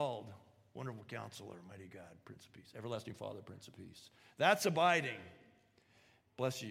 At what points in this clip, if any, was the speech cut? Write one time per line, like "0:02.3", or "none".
none